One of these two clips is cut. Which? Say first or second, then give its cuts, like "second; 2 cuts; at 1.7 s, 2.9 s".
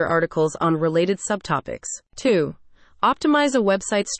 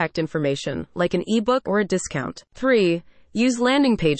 second; 1 cut; at 1.6 s